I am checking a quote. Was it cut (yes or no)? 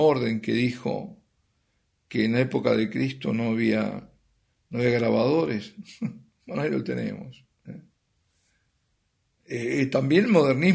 no